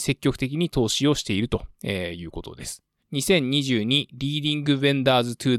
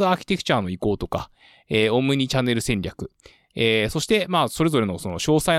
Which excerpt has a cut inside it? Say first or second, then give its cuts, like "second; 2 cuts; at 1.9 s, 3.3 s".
first; 1 cut; at 3.0 s